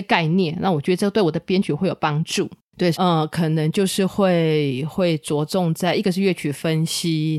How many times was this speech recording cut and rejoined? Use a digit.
1